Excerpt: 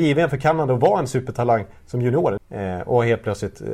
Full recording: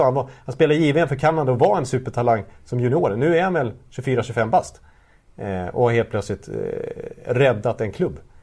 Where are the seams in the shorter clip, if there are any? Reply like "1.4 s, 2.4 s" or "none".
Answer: 2.4 s